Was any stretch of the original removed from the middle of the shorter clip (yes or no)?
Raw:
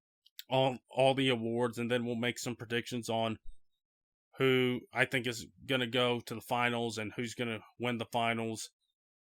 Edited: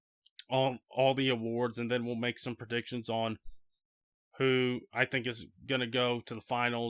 no